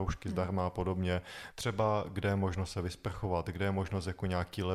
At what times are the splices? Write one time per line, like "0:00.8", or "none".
0:01.5